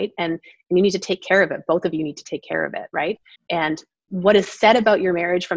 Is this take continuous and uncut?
no; 1 cut; at 3.4 s

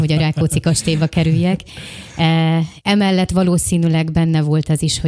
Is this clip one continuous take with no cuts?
no; 1 cut; at 2.8 s

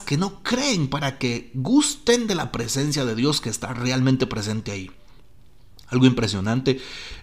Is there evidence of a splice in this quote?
no; 0 cuts

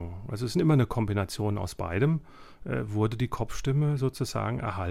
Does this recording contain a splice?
no; 0 cuts

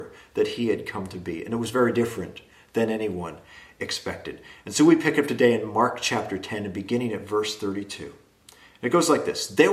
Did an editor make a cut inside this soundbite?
no; 0 cuts

